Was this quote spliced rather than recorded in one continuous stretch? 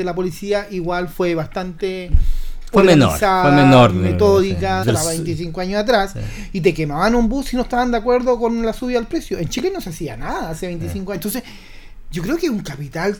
yes; 2 cuts; at 4.8 s, 11.1 s

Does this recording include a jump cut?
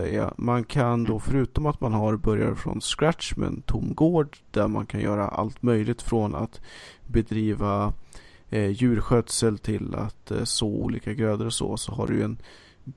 no; 0 cuts

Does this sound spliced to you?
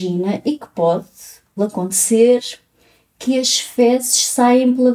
yes; 1 cut; at 1.6 s

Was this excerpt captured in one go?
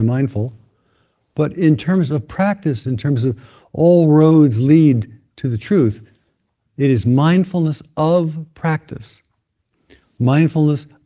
no; 1 cut; at 2.8 s

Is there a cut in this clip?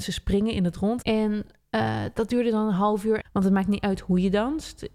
yes; 2 cuts; at 1.0 s, 3.2 s

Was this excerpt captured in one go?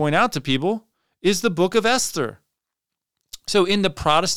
yes; 0 cuts

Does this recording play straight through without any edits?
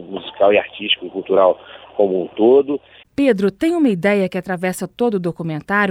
no; 1 cut; at 3.0 s

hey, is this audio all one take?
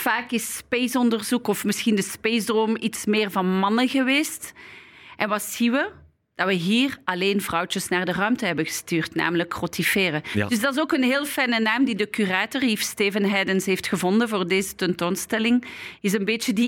yes; 0 cuts

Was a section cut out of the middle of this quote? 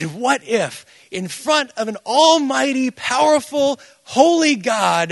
no; 0 cuts

